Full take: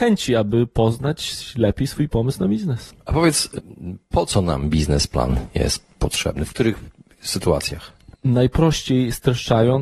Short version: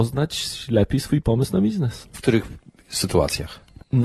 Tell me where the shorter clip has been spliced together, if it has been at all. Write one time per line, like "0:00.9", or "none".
0:02.1